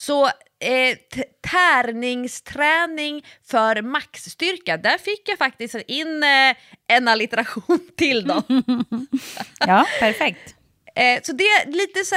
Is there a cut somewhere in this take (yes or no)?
no